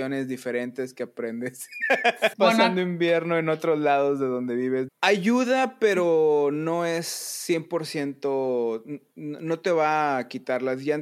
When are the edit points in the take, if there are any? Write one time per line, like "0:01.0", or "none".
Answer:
0:02.3
0:04.9
0:09.1